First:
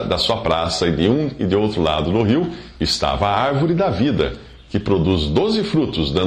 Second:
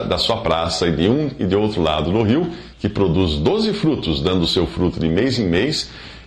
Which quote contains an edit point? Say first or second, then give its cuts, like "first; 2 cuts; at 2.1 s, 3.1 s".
second; 1 cut; at 2.7 s